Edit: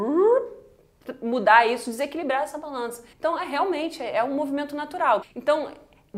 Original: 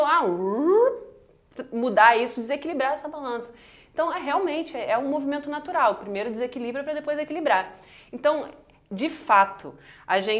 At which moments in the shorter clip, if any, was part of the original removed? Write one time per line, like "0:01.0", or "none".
0:03.1
0:05.2